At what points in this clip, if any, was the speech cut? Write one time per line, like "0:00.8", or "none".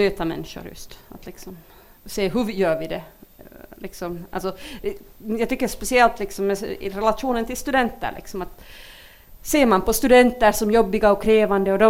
0:02.0